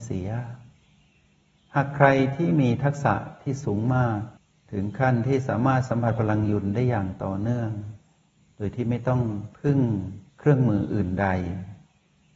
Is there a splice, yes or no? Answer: no